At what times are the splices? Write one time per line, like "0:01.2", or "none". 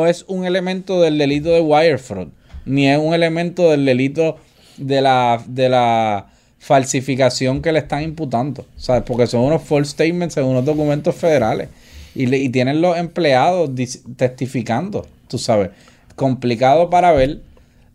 none